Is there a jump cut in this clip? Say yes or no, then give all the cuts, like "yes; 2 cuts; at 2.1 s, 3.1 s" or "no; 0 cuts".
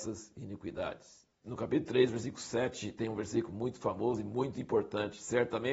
no; 0 cuts